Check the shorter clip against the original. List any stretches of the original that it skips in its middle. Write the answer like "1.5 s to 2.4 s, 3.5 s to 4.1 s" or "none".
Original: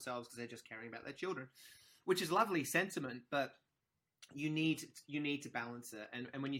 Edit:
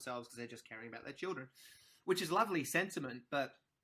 none